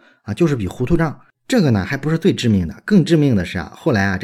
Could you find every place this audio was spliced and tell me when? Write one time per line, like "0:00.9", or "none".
0:01.3